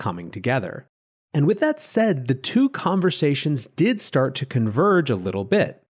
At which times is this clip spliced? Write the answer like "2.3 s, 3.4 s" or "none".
none